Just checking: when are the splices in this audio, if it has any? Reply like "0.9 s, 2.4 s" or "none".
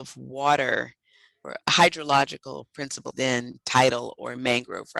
1.4 s, 3.1 s